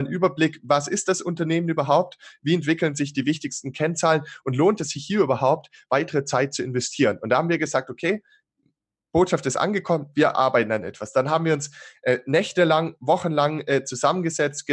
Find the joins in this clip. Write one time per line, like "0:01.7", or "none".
none